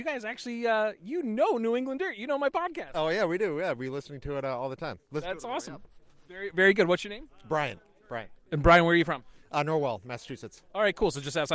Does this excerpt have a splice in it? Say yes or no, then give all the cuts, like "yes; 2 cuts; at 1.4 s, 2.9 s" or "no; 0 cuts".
no; 0 cuts